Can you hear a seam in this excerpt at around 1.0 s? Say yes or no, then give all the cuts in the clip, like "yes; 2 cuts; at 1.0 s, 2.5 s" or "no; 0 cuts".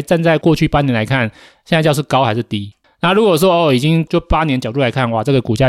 no; 1 cut; at 2.8 s